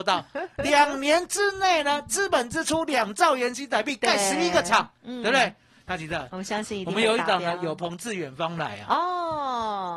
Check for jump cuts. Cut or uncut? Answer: uncut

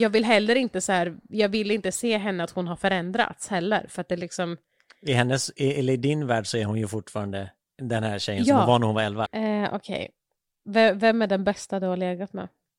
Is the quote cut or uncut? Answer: cut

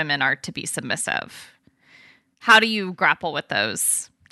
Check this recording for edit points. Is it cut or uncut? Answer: uncut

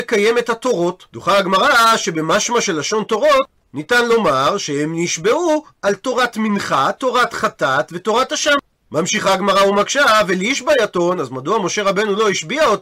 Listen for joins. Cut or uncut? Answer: uncut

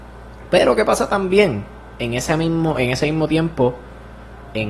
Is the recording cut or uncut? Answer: uncut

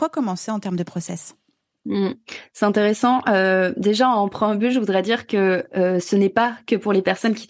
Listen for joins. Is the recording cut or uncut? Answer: uncut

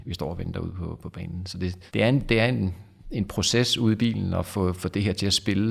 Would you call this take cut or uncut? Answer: cut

